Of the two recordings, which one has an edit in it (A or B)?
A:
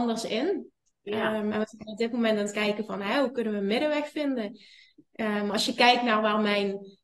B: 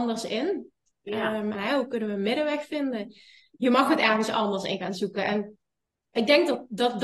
B